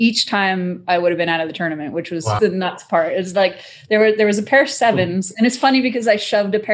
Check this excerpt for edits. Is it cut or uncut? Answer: cut